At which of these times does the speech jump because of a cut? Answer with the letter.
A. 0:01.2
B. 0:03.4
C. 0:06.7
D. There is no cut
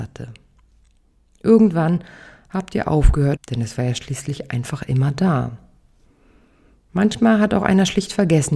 B